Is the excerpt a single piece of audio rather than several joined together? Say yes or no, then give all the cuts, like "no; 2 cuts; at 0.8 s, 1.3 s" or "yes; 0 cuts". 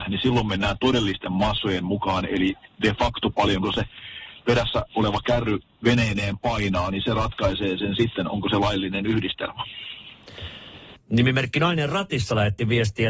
yes; 0 cuts